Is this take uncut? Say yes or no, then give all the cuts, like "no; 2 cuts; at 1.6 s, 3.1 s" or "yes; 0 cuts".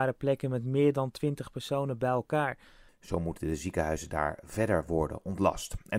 no; 1 cut; at 2.9 s